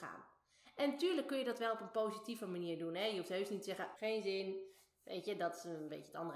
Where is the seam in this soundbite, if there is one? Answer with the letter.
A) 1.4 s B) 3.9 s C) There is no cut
B